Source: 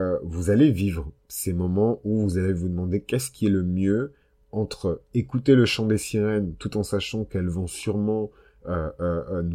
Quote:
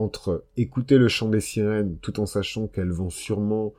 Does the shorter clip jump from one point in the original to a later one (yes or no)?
no